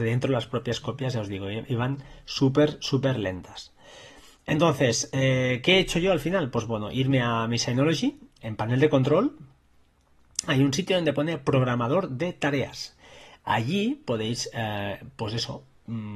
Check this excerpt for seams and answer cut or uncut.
uncut